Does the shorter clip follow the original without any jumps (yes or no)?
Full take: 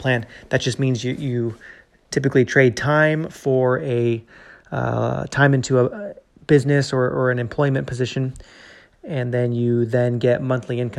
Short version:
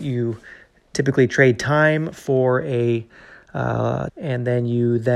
no